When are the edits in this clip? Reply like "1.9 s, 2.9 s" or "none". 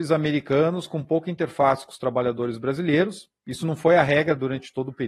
none